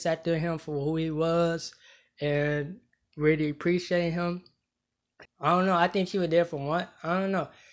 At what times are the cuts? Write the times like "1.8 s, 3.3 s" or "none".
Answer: 5.2 s